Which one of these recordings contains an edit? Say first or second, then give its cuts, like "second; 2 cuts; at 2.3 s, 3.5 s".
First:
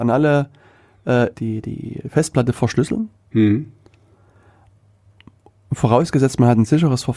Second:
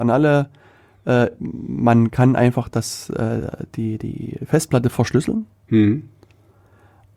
first; 1 cut; at 1.3 s